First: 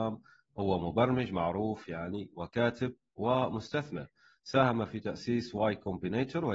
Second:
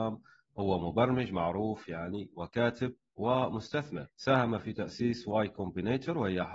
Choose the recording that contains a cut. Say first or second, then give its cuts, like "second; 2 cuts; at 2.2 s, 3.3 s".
second; 1 cut; at 4.1 s